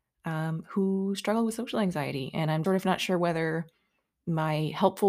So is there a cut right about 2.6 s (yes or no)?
yes